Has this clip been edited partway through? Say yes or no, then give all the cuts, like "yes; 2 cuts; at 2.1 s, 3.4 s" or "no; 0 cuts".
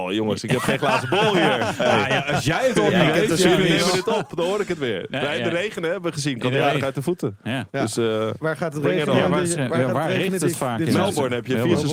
yes; 1 cut; at 8.4 s